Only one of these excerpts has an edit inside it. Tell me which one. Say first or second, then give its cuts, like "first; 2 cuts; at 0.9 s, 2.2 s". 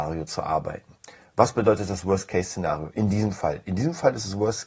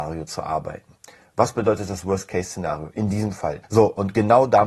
second; 1 cut; at 3.6 s